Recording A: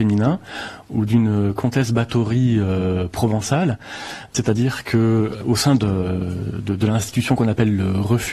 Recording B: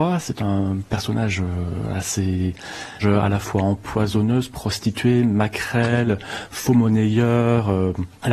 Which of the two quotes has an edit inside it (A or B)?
B